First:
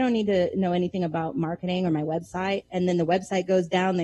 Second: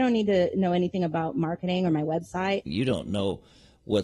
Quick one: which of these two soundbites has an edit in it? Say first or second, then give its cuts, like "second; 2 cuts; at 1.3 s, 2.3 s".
second; 1 cut; at 2.7 s